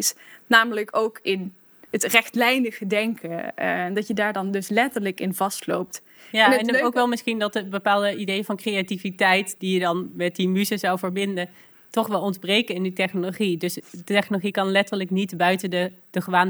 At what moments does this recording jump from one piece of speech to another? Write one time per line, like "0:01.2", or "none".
none